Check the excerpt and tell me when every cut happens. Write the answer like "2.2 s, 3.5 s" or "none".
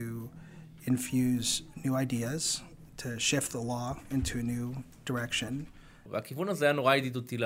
6.1 s